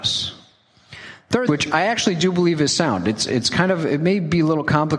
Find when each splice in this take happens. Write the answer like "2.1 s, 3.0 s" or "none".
1.5 s